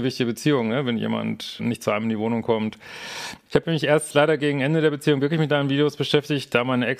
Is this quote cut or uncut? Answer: cut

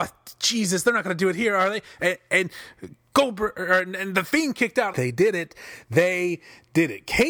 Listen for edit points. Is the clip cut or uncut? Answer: cut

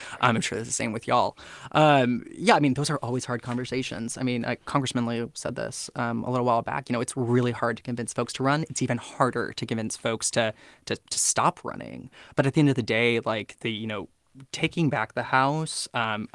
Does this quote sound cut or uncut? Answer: uncut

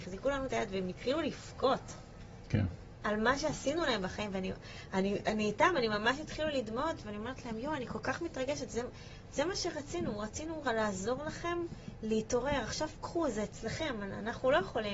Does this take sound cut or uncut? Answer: uncut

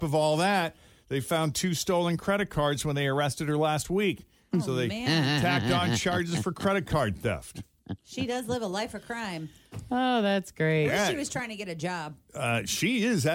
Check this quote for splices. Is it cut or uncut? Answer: uncut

